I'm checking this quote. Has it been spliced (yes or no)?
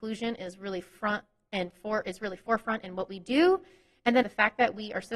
yes